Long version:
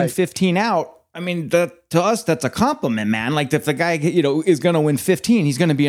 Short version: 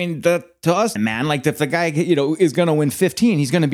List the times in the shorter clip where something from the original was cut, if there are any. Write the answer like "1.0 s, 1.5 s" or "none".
1.0 s